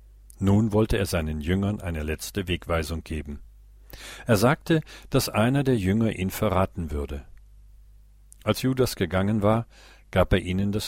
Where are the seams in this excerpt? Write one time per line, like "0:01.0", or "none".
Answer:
none